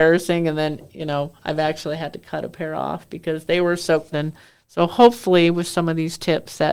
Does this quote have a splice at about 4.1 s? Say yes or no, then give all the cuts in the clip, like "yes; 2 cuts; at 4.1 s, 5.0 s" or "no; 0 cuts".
yes; 2 cuts; at 1.4 s, 4.1 s